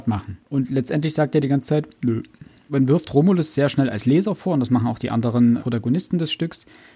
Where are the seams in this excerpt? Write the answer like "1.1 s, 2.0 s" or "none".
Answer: 5.6 s